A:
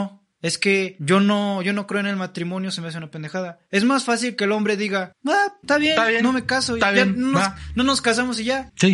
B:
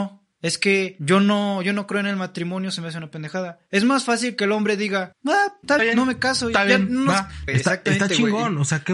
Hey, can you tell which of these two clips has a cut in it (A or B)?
B